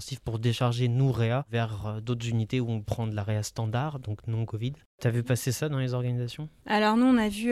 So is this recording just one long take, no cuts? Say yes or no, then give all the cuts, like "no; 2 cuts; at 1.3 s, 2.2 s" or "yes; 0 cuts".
yes; 0 cuts